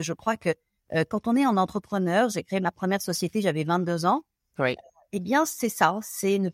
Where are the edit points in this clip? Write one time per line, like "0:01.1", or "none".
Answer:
none